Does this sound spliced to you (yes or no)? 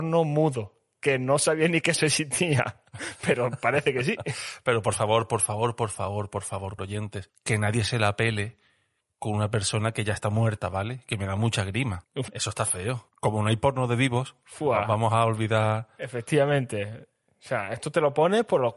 yes